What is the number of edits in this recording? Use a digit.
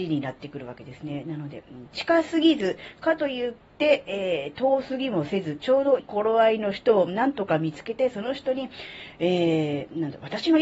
1